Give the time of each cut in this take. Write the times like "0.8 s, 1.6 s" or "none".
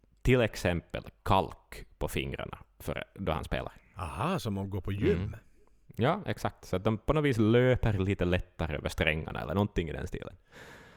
none